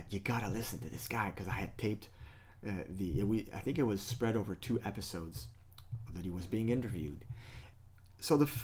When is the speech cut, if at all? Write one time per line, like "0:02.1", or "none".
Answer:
0:06.1